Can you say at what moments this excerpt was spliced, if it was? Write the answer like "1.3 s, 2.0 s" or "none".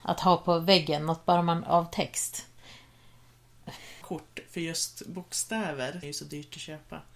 4.0 s, 6.0 s